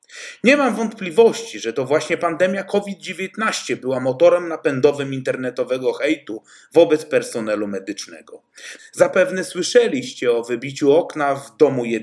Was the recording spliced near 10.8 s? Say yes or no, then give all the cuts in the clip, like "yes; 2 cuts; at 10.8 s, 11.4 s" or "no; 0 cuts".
no; 1 cut; at 8.8 s